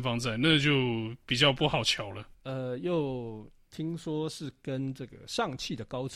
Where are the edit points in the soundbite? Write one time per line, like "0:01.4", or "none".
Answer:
0:02.3